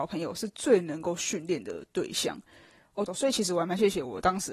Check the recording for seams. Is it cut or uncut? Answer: cut